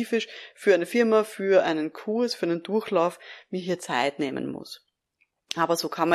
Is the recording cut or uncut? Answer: uncut